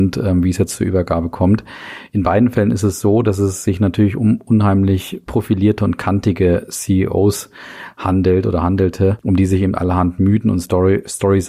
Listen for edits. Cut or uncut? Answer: uncut